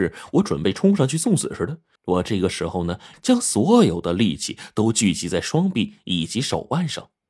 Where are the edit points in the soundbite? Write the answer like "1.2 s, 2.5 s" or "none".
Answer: 2.0 s, 3.1 s